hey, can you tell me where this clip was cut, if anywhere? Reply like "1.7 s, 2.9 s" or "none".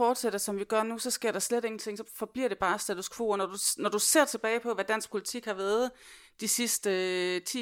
none